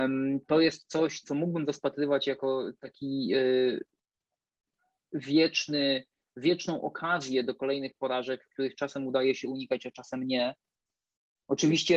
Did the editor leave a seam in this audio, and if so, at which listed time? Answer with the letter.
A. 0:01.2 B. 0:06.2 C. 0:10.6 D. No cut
A